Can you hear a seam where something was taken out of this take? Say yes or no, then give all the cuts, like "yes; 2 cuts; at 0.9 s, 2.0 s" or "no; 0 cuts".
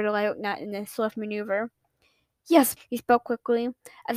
yes; 1 cut; at 2.8 s